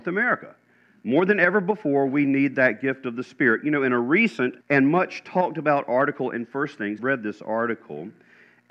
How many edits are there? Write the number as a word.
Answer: two